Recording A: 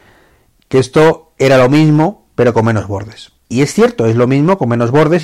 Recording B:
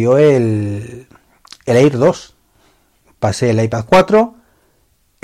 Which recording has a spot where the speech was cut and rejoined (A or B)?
A